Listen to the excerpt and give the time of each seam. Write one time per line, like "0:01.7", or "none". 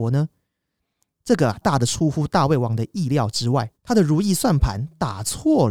0:01.6
0:03.7